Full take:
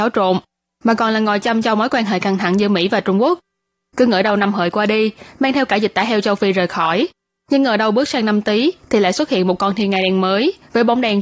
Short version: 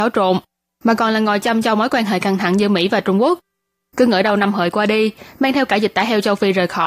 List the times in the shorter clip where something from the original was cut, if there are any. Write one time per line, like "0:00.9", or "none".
none

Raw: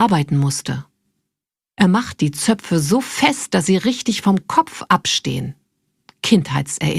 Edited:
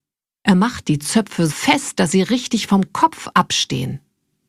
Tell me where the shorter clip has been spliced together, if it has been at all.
0:01.5

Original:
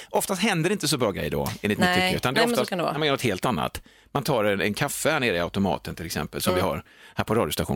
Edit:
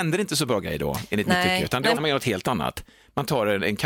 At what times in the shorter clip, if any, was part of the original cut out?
0:02.0

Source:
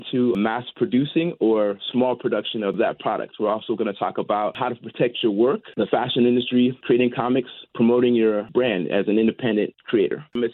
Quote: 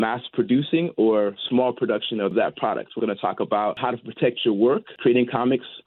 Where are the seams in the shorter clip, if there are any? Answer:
0:03.0
0:05.0

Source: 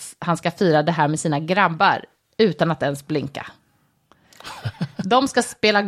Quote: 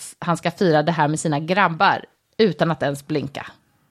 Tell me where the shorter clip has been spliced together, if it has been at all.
none

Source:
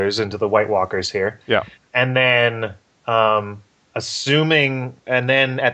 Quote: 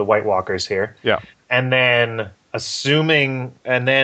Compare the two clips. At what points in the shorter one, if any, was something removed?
0:02.4

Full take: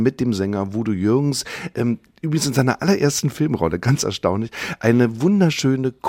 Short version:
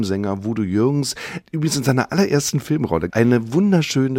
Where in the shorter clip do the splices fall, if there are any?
0:01.4
0:03.1

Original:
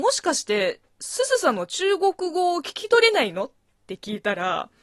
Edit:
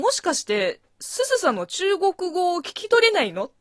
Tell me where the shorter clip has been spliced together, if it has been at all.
none

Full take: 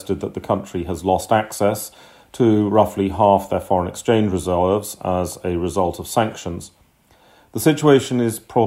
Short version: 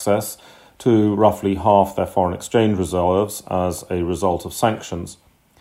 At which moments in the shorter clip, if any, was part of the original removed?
none

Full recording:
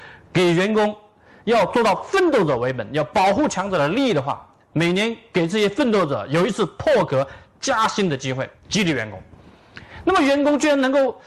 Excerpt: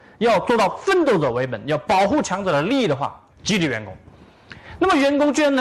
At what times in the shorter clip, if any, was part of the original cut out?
0:03.3

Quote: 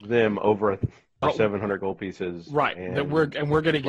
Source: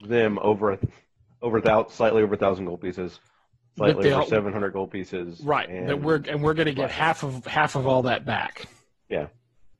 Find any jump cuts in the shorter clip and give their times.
0:01.2

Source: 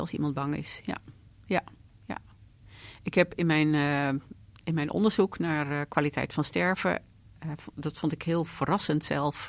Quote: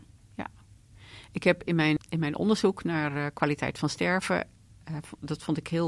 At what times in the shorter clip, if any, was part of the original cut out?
0:02.0

